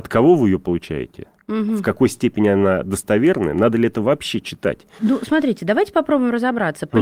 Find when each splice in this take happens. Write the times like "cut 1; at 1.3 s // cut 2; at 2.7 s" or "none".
cut 1; at 5.0 s